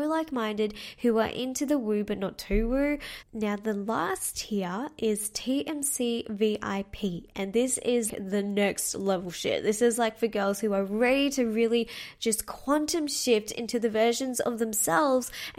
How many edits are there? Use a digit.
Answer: 2